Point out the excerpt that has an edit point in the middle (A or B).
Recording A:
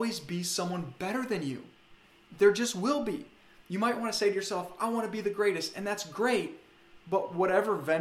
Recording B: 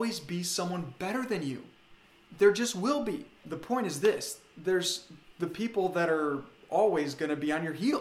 B